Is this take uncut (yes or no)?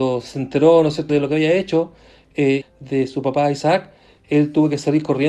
no